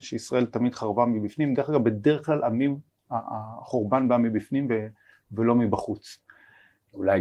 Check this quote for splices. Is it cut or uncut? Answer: uncut